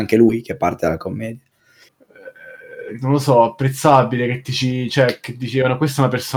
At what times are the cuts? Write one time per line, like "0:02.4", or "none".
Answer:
0:01.9